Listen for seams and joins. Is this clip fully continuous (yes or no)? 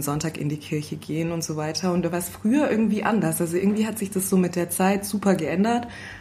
yes